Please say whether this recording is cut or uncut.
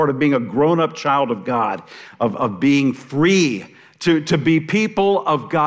uncut